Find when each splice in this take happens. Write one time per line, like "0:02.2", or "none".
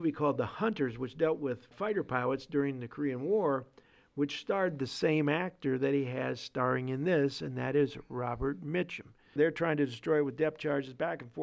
0:01.7
0:09.4